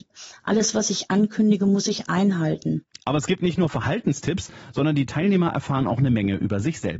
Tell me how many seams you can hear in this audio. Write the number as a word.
one